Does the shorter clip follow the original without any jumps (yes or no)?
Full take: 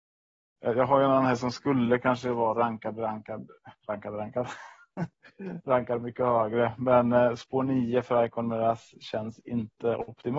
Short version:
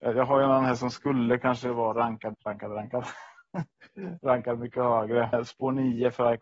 no